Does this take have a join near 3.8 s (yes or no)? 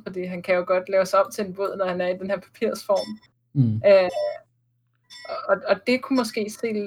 no